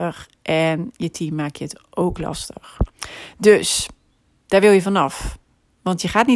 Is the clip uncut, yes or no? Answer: yes